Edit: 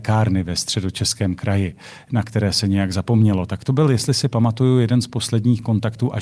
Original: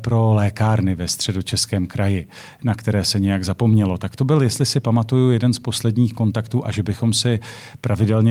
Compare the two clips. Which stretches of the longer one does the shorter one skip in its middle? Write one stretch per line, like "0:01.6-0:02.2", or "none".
none